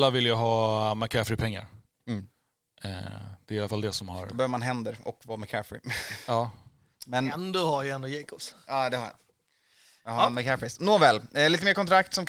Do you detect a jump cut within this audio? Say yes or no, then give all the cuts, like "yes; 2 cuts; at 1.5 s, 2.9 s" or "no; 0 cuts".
no; 0 cuts